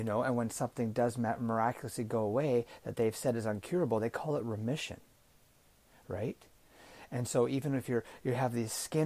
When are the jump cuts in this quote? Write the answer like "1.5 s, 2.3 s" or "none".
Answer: none